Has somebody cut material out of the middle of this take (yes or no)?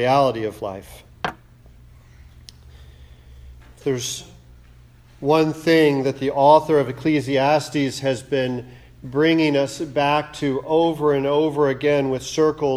no